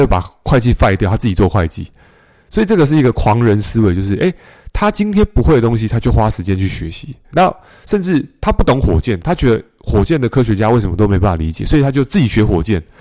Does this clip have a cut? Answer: yes; 2 cuts; at 7.3 s, 9.2 s

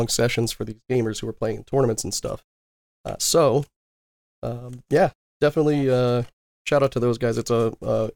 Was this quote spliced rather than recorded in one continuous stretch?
no; 0 cuts

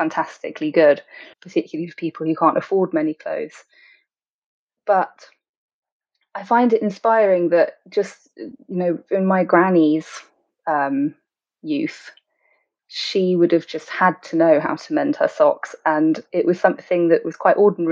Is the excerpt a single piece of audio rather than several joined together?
no; 1 cut; at 1.3 s

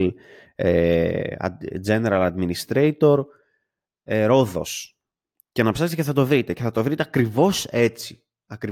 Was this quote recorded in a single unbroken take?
yes; 0 cuts

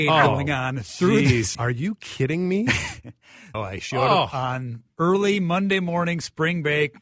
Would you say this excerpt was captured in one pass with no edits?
no; 2 cuts; at 1.5 s, 3.5 s

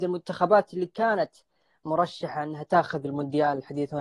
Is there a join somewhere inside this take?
no; 0 cuts

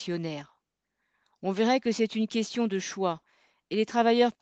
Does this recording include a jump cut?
no; 0 cuts

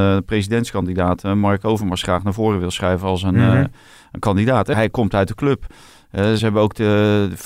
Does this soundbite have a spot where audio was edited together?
yes; 2 cuts; at 4.7 s, 6.4 s

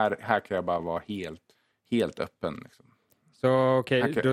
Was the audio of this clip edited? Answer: no; 0 cuts

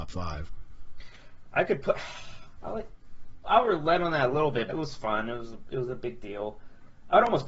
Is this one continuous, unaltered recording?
no; 2 cuts; at 3.4 s, 4.7 s

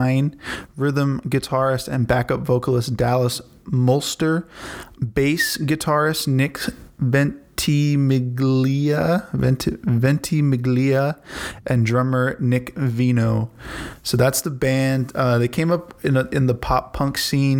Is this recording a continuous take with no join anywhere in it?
yes; 0 cuts

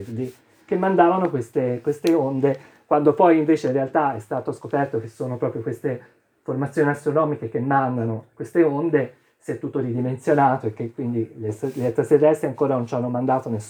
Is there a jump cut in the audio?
no; 0 cuts

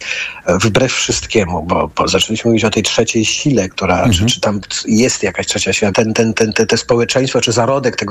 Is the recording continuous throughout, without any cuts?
no; 2 cuts; at 3.7 s, 5.9 s

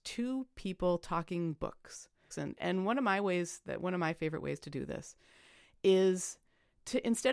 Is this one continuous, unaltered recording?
no; 1 cut; at 2.3 s

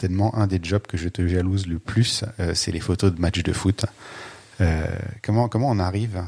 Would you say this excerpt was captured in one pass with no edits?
yes; 0 cuts

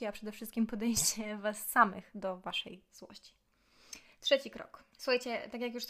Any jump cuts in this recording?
yes; 1 cut; at 4.9 s

